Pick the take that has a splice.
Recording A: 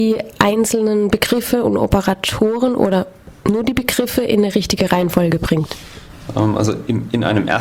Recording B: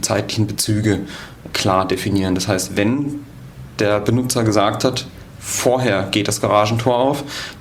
B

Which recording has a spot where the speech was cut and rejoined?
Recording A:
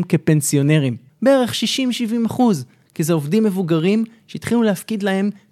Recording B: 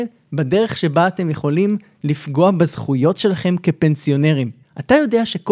A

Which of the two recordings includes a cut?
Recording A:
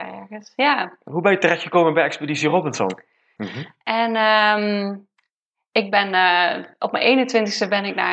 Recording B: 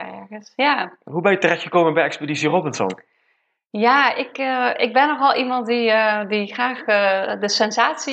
A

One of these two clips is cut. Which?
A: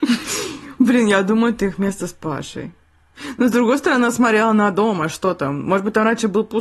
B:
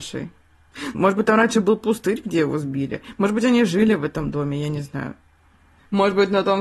B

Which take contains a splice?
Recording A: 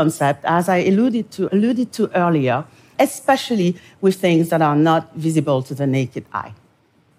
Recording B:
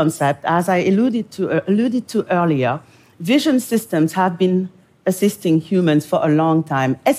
A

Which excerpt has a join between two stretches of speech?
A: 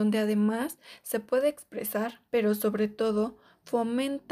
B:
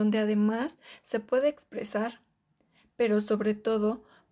A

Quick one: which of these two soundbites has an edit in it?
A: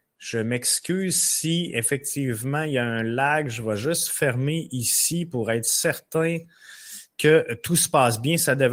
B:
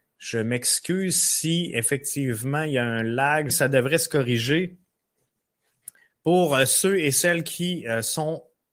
B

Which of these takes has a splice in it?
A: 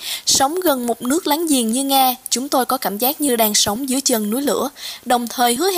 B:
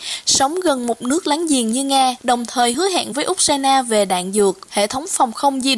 B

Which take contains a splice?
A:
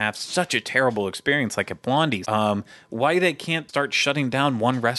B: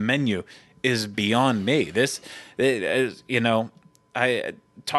A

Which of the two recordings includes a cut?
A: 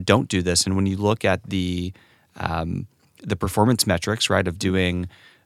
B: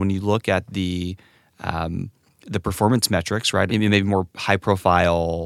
B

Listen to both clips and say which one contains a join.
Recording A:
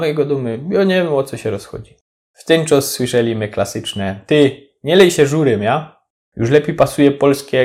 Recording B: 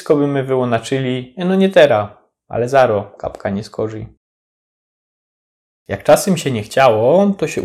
A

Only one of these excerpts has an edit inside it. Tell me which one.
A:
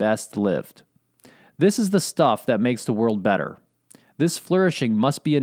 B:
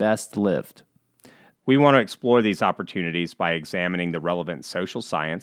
B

